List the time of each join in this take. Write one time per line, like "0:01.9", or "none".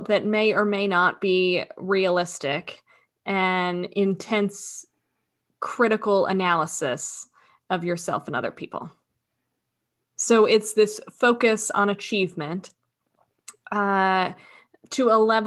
0:10.0